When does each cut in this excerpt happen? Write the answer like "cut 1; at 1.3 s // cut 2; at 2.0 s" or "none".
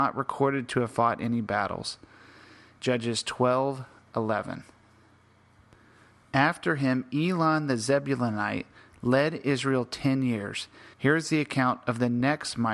cut 1; at 2.8 s // cut 2; at 10.9 s